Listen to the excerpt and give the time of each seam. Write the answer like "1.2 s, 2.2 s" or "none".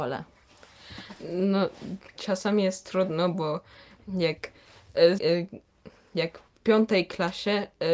2.2 s, 5.2 s